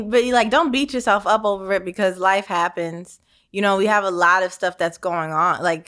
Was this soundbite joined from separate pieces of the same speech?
no; 0 cuts

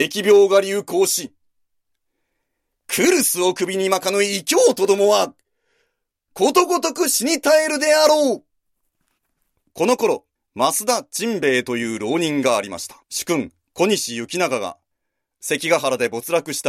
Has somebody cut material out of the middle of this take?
yes; 2 cuts; at 10.4 s, 13.0 s

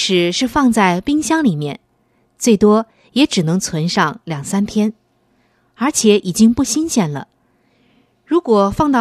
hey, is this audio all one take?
yes; 0 cuts

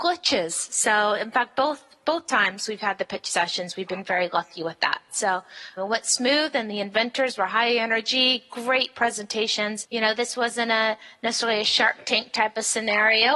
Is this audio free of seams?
no; 2 cuts; at 5.8 s, 9.8 s

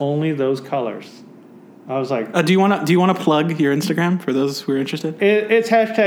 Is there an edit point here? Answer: no; 0 cuts

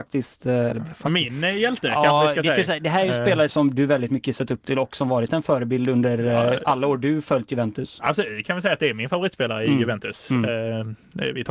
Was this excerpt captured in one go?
no; 1 cut; at 3.5 s

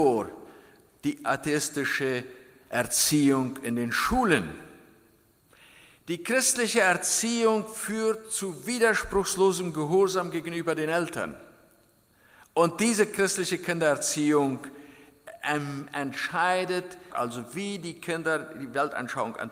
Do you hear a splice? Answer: yes; 1 cut; at 17.1 s

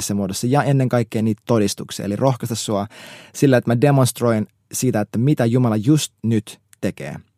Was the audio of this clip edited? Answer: no; 0 cuts

